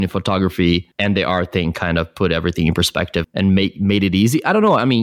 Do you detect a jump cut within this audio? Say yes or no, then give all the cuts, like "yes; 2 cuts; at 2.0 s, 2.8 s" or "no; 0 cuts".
yes; 2 cuts; at 0.9 s, 3.2 s